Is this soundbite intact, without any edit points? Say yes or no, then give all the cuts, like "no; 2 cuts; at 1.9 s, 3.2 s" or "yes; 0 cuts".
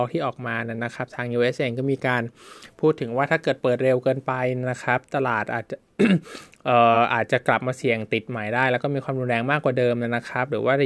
yes; 0 cuts